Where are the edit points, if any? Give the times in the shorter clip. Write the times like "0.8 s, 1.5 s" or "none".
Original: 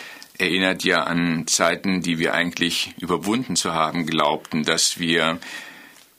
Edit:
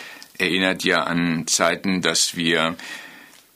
2.0 s